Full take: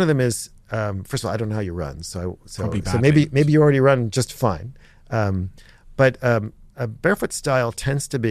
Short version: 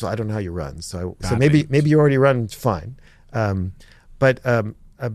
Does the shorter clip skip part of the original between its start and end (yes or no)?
yes